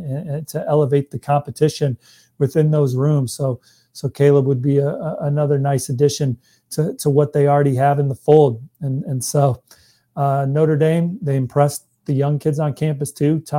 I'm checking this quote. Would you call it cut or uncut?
uncut